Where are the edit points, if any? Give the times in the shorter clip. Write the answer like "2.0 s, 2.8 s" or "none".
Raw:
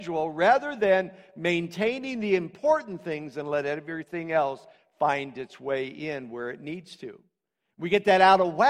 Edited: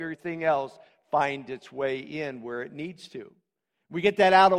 none